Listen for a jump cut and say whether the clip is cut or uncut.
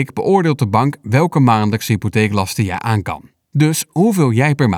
uncut